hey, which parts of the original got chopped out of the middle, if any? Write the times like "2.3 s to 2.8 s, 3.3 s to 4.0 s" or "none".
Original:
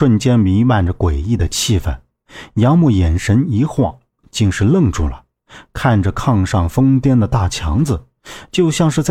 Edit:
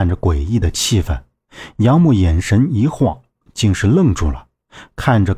none